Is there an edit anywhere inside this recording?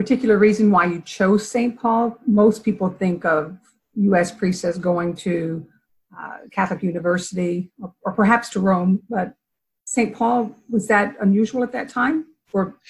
no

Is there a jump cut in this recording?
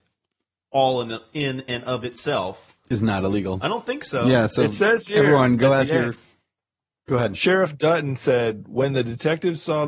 no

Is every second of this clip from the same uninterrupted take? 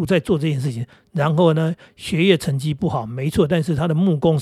yes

